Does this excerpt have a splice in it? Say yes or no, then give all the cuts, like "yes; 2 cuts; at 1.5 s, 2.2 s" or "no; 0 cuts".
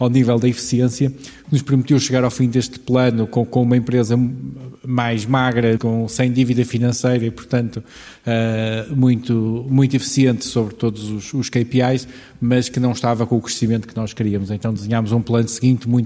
yes; 1 cut; at 5.8 s